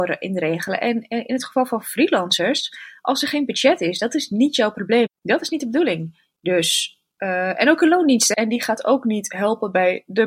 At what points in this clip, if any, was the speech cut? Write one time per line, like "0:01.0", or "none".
0:05.1
0:08.3